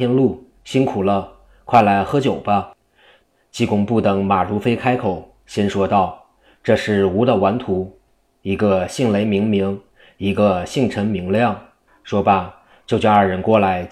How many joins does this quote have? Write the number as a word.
one